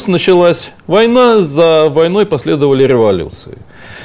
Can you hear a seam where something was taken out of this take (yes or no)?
no